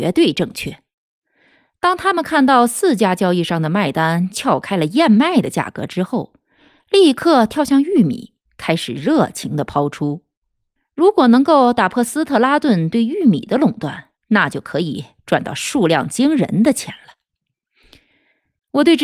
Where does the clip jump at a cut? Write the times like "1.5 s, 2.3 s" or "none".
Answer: 10.8 s, 14.2 s